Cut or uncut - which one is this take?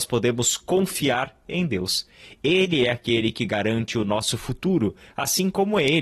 uncut